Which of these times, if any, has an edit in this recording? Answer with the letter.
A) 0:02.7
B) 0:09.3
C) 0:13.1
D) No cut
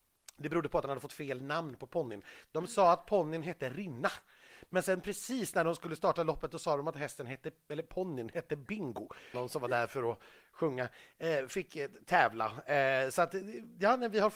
B